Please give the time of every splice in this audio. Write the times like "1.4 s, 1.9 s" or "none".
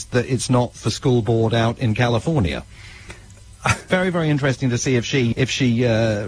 3.9 s, 5.3 s